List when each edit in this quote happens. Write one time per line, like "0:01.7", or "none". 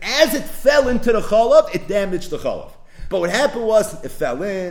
0:03.1